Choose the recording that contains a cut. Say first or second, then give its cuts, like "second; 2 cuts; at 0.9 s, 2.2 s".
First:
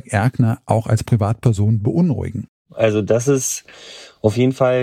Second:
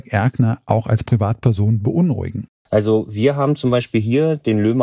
second; 1 cut; at 2.7 s